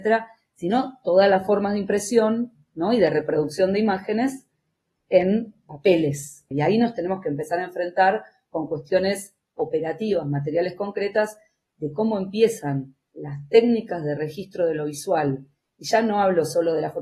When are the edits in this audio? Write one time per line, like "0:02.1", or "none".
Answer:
0:06.5